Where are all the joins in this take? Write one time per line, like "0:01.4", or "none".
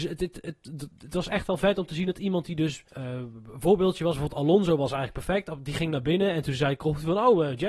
0:02.9